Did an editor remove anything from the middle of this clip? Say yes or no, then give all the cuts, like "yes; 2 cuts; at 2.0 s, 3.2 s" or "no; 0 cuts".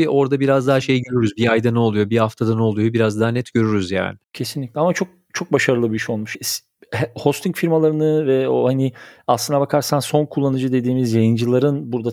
yes; 2 cuts; at 4.2 s, 6.3 s